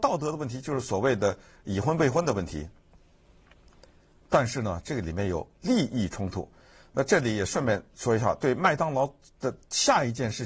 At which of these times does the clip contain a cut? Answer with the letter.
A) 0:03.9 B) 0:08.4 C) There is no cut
C